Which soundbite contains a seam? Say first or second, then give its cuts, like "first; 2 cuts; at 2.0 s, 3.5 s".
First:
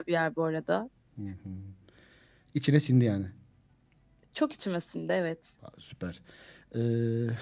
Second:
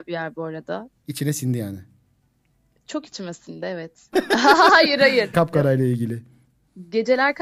second; 3 cuts; at 1.0 s, 4.1 s, 5.3 s